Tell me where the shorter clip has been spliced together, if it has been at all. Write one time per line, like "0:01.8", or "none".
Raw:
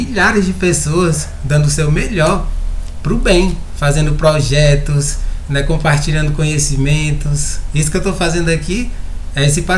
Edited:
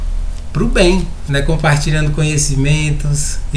0:01.3